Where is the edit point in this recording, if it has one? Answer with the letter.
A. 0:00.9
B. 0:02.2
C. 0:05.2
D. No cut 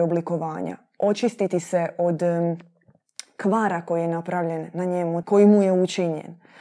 C